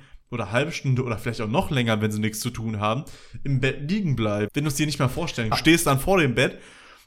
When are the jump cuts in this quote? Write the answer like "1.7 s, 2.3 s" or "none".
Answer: 4.5 s, 5.5 s

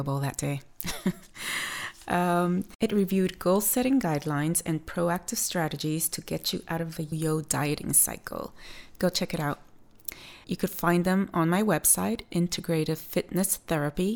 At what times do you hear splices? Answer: 7.1 s, 10.4 s

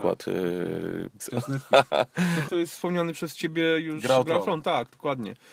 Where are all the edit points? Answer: 1.2 s, 2.5 s

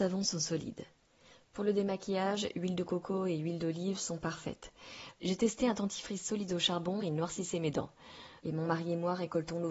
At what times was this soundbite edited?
5.1 s, 7.0 s, 8.4 s

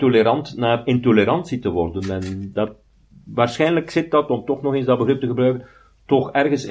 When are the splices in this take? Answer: none

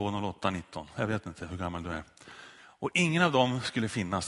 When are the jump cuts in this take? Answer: 2.6 s

